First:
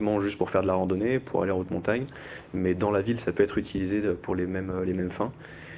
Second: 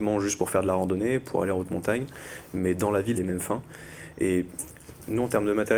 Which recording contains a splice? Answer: second; 1 cut; at 3.1 s

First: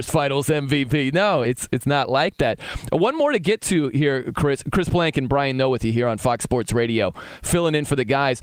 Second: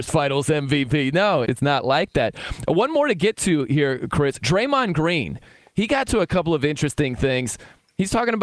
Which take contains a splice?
second; 2 cuts; at 1.4 s, 4.4 s

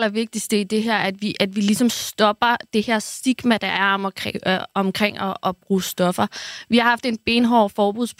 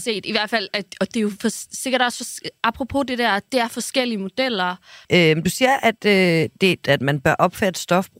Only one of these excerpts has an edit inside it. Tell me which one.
second; 2 cuts; at 5.0 s, 6.8 s

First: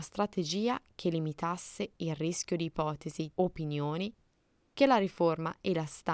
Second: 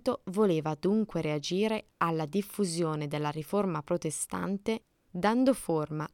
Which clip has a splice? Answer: first; 1 cut; at 3.3 s

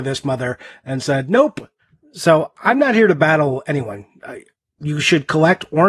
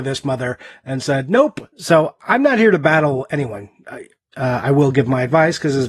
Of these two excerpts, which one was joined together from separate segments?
second; 2 cuts; at 1.7 s, 4.3 s

